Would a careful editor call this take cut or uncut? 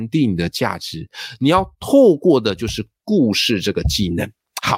uncut